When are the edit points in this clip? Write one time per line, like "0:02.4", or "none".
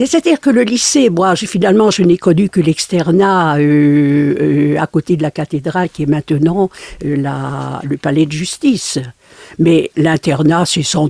none